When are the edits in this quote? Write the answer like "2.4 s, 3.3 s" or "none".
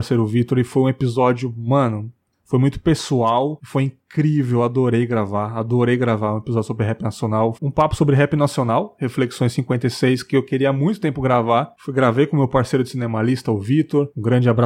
7.5 s